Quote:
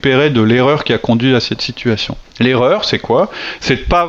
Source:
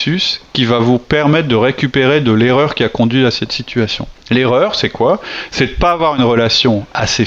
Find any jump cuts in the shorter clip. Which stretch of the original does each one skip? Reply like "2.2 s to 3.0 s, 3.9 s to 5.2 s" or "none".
none